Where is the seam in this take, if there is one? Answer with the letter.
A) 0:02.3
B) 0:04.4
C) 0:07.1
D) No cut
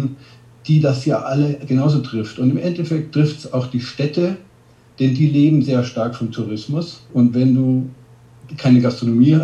C